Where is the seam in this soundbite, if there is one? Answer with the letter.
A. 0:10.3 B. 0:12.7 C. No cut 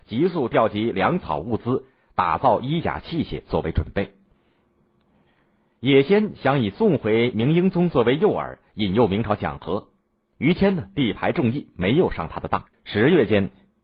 B